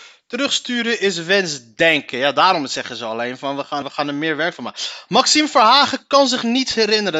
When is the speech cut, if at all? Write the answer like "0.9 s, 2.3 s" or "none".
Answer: 3.8 s